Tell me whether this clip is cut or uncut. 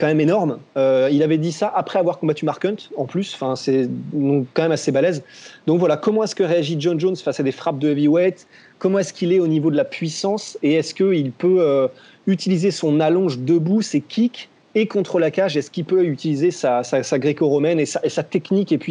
uncut